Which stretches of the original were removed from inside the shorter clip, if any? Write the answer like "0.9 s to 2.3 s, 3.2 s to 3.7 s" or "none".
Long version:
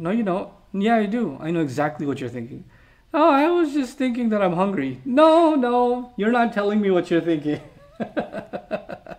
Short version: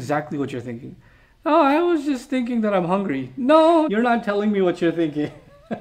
5.5 s to 6.1 s